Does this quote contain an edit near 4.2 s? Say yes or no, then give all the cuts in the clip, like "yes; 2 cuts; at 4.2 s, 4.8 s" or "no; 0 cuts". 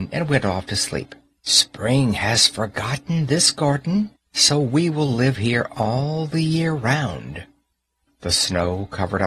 yes; 2 cuts; at 1.4 s, 4.2 s